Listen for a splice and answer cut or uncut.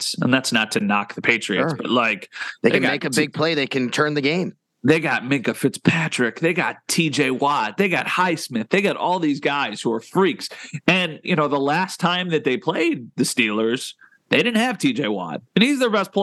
cut